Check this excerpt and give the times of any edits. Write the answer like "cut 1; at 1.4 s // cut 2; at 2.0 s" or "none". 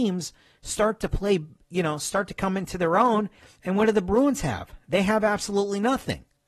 none